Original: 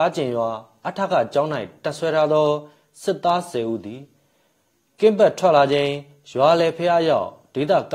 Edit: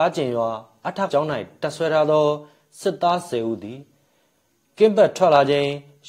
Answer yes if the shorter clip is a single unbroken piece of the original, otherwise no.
no